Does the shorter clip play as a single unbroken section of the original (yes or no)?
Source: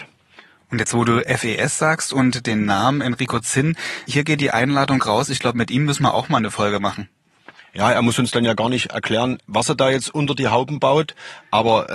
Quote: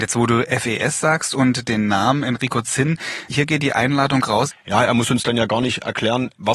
no